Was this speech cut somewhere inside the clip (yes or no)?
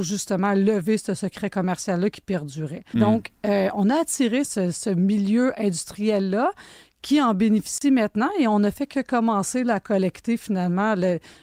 yes